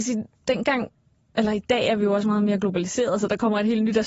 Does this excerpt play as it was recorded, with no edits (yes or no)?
yes